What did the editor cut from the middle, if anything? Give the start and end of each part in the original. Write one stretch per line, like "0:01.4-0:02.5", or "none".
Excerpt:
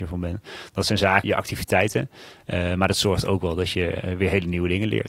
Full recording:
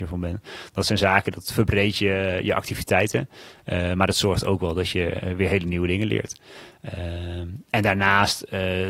0:01.2-0:02.4